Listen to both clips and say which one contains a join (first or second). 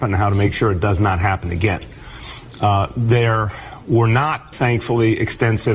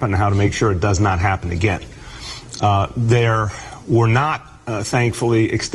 first